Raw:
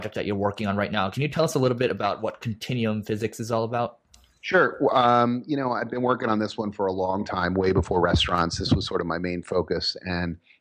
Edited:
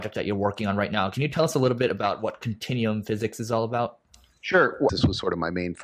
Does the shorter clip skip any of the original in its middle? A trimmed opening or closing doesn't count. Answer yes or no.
yes